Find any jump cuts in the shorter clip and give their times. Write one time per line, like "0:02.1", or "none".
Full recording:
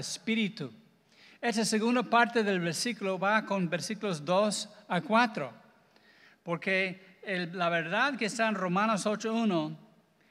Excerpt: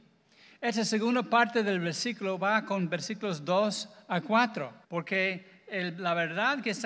0:04.8